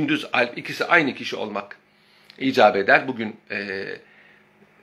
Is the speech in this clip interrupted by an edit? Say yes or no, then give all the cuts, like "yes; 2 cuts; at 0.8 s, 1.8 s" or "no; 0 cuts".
no; 0 cuts